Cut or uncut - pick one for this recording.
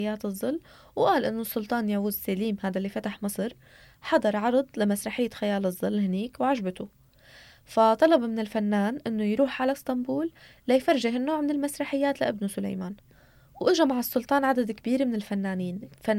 uncut